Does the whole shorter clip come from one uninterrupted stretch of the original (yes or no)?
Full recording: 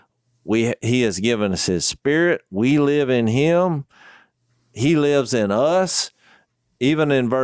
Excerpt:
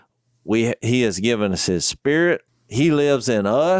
no